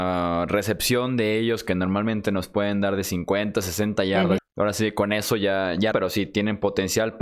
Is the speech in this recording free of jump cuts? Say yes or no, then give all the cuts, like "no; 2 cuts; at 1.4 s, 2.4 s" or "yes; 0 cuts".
no; 2 cuts; at 4.4 s, 5.9 s